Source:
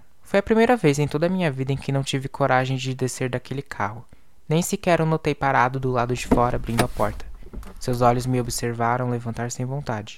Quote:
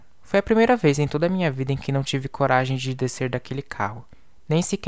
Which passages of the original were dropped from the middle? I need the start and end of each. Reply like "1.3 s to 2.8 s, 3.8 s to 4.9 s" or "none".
none